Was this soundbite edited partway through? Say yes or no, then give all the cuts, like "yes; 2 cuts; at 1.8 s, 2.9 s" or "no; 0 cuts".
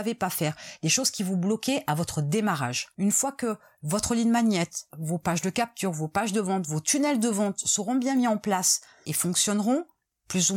yes; 1 cut; at 4.9 s